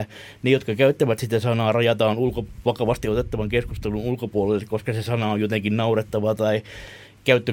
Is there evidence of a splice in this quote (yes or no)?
no